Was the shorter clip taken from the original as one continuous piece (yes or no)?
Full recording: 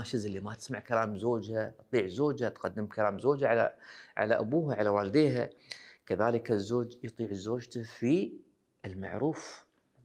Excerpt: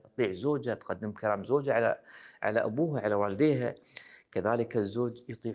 yes